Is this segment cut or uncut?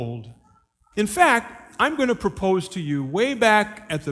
cut